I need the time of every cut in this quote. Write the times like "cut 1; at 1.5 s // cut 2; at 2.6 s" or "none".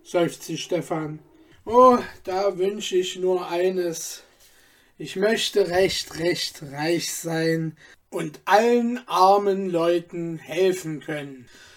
cut 1; at 1.5 s